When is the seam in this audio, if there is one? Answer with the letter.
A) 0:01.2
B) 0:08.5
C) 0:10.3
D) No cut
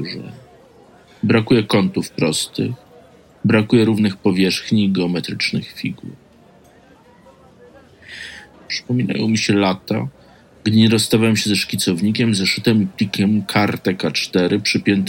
B